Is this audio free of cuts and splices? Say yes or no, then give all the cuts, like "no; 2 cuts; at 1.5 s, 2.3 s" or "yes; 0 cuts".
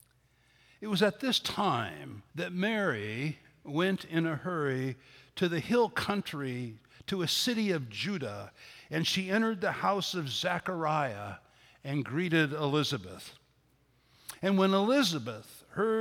no; 1 cut; at 2.3 s